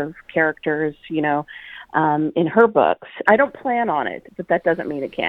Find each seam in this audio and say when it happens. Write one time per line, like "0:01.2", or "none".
0:03.3